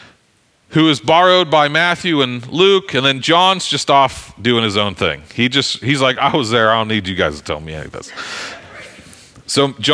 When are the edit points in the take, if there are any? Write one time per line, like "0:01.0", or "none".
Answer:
none